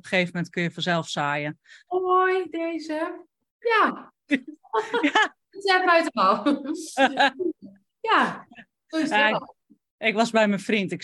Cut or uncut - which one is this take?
cut